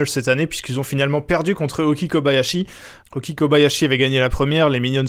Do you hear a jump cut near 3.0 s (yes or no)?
yes